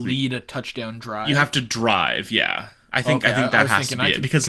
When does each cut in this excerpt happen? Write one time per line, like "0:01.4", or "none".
none